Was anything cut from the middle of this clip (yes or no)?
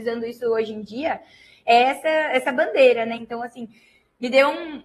yes